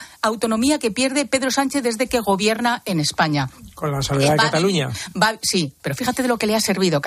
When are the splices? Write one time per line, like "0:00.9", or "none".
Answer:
none